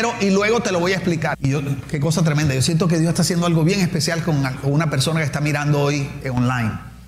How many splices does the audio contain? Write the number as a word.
one